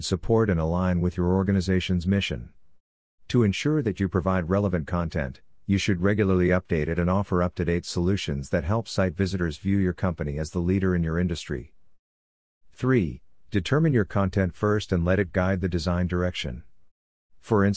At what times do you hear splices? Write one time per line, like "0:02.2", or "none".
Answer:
0:13.4